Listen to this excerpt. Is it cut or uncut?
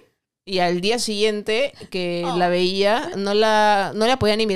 cut